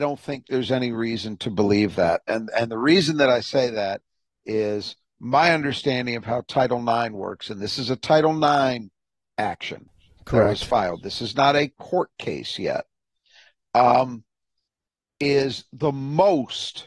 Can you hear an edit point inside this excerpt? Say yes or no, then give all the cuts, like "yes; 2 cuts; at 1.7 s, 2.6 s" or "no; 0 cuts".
no; 0 cuts